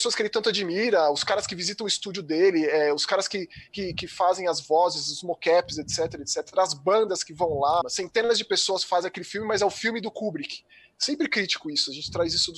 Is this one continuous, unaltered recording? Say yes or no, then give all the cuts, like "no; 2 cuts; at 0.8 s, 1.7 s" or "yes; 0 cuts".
no; 1 cut; at 7.8 s